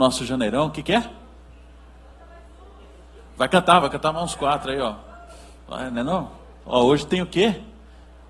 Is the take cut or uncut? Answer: cut